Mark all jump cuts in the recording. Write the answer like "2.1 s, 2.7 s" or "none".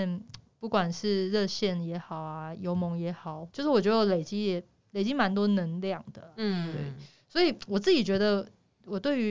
3.5 s